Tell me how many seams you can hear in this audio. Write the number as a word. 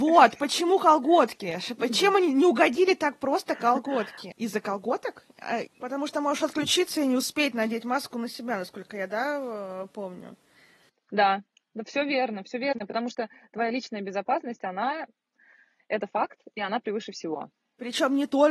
two